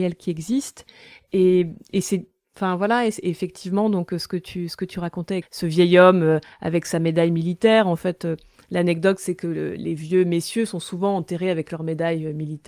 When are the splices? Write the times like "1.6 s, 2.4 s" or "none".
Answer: 5.4 s

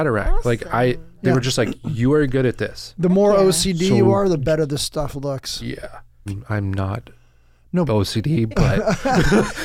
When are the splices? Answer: 6.3 s, 7.9 s

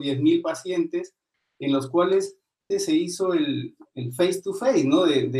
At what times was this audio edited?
2.7 s

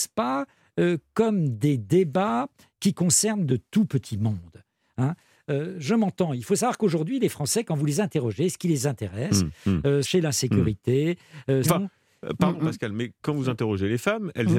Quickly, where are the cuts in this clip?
10.0 s, 11.6 s

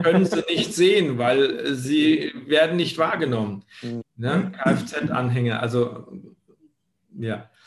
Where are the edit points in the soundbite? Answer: 4.0 s

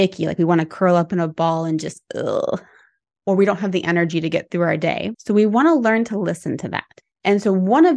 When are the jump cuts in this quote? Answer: 5.2 s

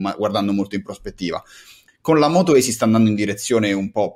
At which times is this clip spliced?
1.9 s

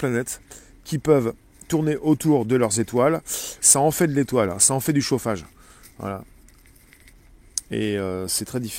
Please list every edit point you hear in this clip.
3.6 s

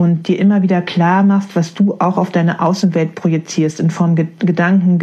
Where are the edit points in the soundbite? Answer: none

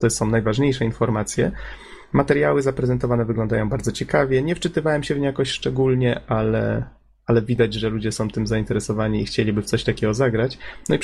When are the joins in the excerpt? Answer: none

